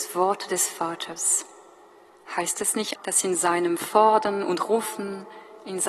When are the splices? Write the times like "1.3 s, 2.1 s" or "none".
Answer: 3.0 s